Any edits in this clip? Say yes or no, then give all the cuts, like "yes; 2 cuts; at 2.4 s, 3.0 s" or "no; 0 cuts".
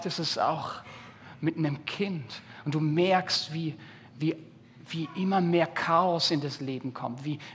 no; 0 cuts